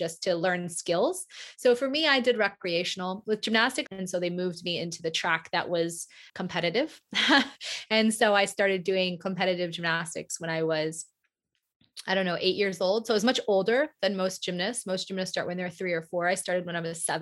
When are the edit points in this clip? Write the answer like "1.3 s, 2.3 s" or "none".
3.9 s, 6.3 s